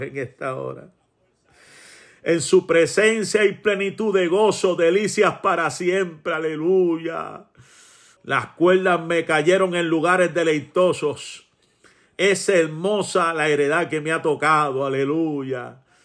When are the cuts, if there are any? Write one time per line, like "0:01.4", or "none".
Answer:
0:08.2